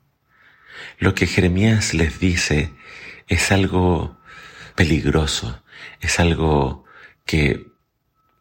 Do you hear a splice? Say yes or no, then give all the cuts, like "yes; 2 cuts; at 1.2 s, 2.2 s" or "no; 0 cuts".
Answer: yes; 1 cut; at 4.7 s